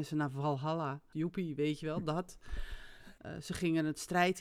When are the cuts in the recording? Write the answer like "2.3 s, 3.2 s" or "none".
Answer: 1.1 s, 3.2 s